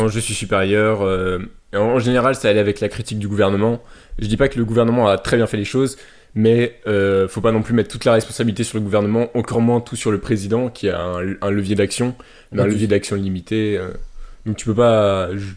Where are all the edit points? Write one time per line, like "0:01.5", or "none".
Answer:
none